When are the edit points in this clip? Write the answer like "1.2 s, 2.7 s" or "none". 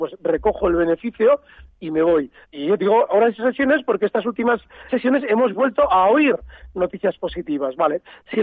2.4 s, 4.9 s

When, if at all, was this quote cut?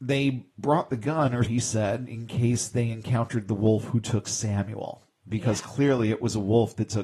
1.4 s

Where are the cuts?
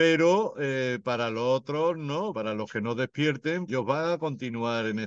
2.3 s, 3.7 s

